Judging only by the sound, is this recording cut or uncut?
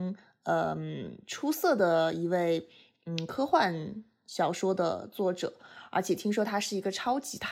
uncut